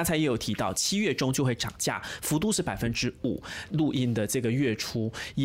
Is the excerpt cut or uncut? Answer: cut